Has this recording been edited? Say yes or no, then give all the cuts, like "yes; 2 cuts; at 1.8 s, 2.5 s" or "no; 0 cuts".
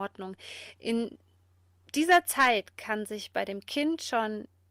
no; 0 cuts